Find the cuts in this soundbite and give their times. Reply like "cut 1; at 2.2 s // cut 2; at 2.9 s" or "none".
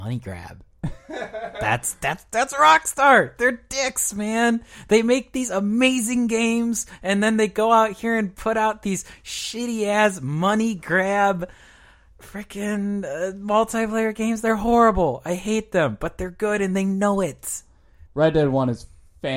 cut 1; at 18.1 s